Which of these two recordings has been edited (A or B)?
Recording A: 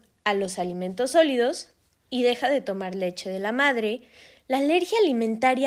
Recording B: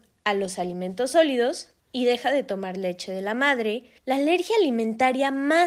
B